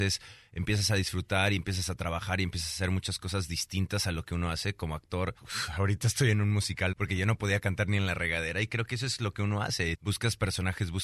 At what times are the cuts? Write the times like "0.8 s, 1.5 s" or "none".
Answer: 5.4 s, 6.9 s, 9.9 s